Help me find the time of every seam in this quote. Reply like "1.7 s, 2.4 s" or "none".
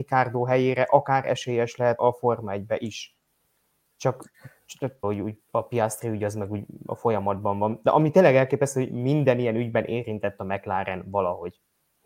2.0 s, 5.0 s